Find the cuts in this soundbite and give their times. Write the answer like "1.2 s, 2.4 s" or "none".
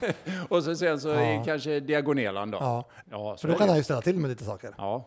3.0 s